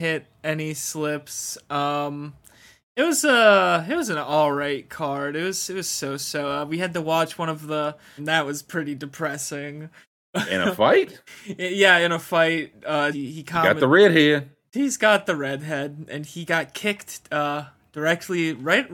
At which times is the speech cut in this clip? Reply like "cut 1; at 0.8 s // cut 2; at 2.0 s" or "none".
cut 1; at 8.2 s // cut 2; at 13.1 s // cut 3; at 14.7 s